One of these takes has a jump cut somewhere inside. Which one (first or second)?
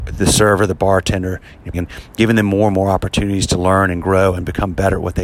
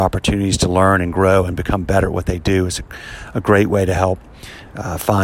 first